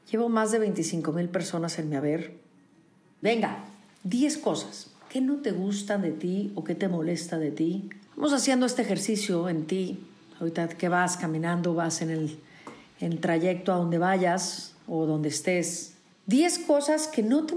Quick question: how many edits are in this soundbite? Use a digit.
2